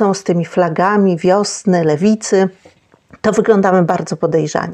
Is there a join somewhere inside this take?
no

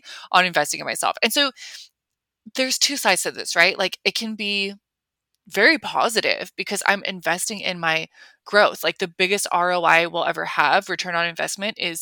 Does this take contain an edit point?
no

